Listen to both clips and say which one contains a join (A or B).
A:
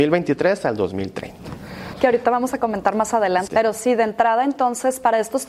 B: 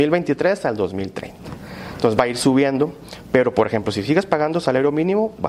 A